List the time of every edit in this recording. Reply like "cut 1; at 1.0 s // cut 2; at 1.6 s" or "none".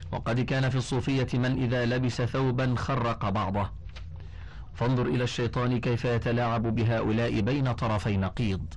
cut 1; at 4.7 s